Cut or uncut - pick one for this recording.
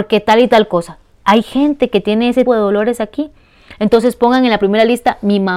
cut